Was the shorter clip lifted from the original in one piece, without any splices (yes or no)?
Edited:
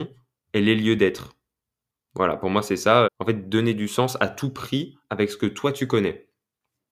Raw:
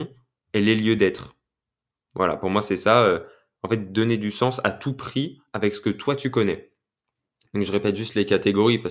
no